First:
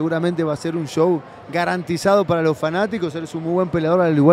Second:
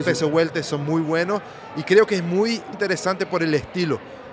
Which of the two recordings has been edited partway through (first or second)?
second